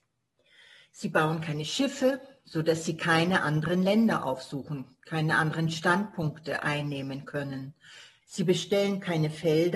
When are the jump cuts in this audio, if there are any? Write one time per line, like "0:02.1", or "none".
0:08.2